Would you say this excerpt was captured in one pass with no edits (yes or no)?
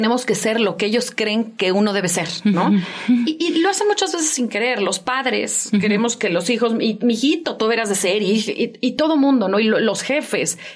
yes